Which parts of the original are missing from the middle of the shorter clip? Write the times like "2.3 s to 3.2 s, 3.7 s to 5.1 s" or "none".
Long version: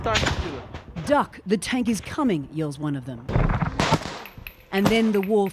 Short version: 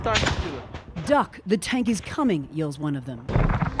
none